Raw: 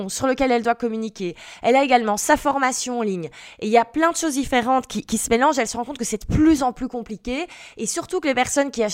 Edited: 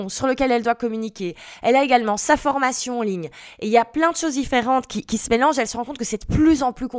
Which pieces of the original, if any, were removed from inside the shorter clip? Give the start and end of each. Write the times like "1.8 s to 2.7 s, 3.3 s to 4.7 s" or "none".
none